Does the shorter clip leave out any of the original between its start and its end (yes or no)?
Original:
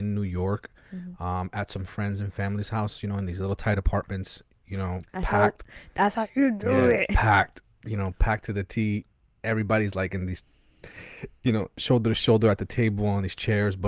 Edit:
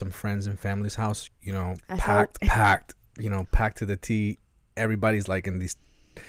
yes